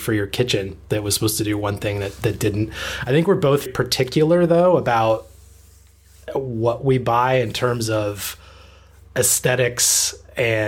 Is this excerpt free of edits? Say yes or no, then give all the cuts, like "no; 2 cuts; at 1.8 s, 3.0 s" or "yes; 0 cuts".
no; 1 cut; at 3.7 s